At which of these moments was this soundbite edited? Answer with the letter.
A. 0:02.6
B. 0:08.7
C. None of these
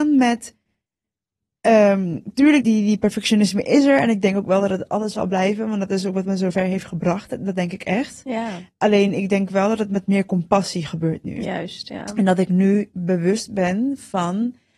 A